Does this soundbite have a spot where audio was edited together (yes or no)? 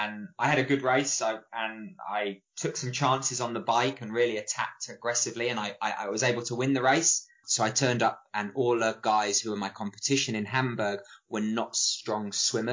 yes